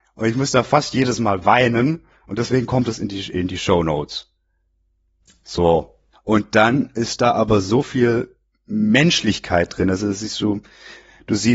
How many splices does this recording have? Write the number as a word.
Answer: one